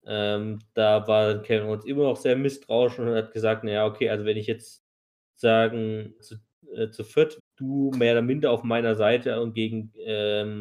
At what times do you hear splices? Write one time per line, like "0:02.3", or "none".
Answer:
0:06.2
0:07.4